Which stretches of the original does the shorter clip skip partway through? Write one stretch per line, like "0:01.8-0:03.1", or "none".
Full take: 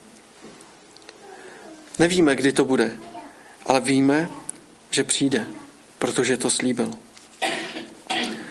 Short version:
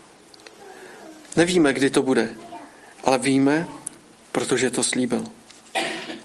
0:04.9-0:05.9